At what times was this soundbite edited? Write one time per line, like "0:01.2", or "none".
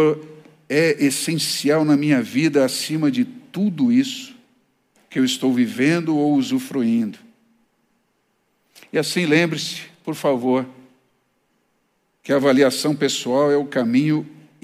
none

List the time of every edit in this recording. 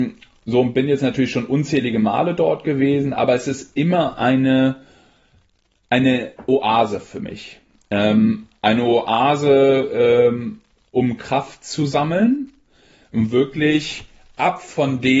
none

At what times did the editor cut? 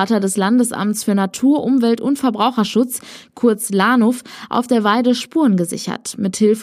none

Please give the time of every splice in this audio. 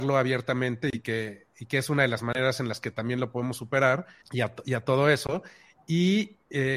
0:04.2

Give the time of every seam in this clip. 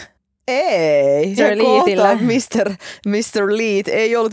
0:01.4

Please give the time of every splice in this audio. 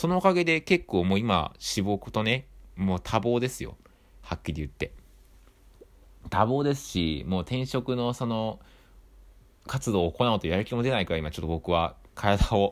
none

